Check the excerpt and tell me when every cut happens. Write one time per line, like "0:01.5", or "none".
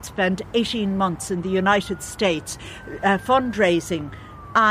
none